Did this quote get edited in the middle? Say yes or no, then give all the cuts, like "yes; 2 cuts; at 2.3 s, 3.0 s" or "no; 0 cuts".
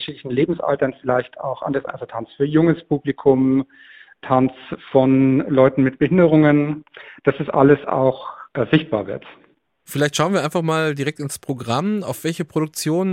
yes; 1 cut; at 1.9 s